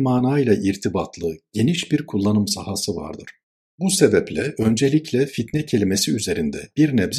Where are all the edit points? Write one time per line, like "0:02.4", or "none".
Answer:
0:03.7